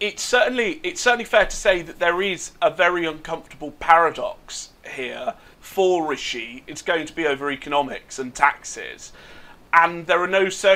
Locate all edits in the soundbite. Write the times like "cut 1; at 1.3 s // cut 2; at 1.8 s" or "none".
cut 1; at 5.5 s // cut 2; at 6.7 s